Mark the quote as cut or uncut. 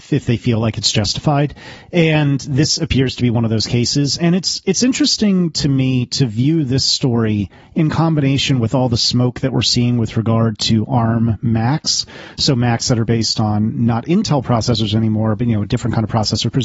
uncut